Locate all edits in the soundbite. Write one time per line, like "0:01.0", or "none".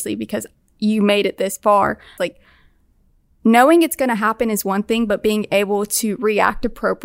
0:02.2